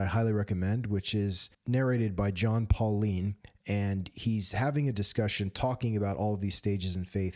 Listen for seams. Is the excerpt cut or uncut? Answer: uncut